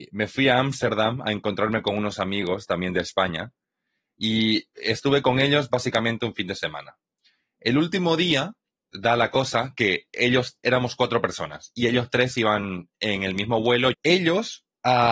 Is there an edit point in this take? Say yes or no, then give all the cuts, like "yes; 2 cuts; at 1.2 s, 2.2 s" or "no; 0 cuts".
yes; 2 cuts; at 10.6 s, 13.9 s